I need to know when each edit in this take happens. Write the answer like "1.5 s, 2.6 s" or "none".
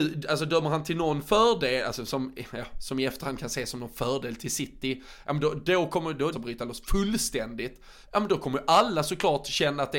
6.3 s, 8.0 s